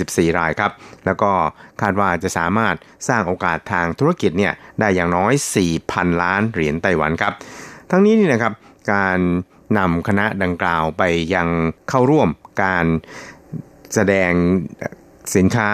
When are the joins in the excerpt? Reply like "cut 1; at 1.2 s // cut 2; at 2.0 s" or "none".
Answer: cut 1; at 11.8 s